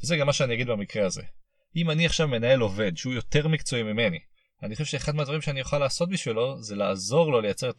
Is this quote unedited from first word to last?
yes; 0 cuts

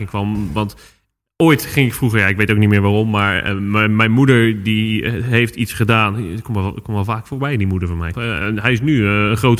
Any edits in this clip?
yes; 1 cut; at 8.1 s

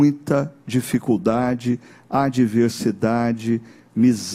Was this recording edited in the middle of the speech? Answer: no; 0 cuts

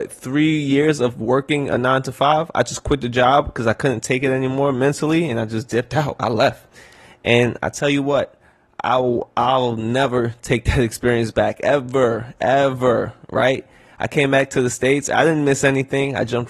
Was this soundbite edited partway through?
no; 0 cuts

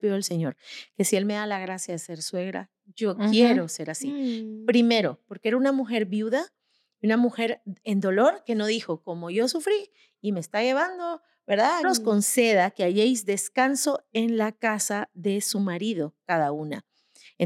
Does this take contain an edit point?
yes; 2 cuts; at 7.8 s, 11.8 s

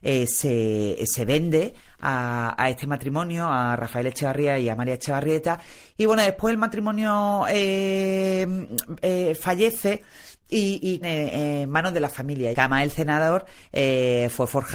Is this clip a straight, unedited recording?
no; 2 cuts; at 11.0 s, 12.5 s

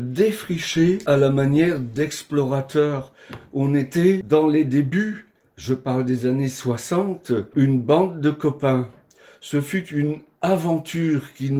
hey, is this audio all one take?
yes; 0 cuts

